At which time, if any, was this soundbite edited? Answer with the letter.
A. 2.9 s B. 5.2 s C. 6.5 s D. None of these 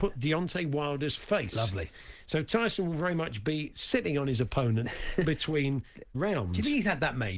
B